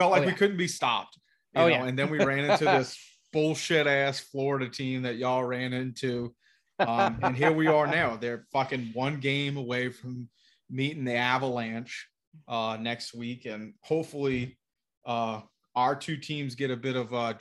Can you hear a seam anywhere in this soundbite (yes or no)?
no